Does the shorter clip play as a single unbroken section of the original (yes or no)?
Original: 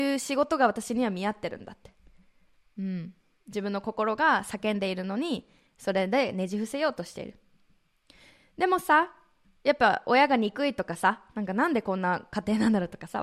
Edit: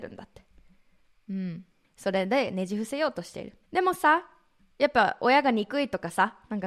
no